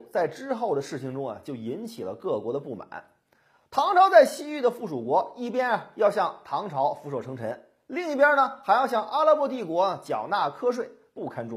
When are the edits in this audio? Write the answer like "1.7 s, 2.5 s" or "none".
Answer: none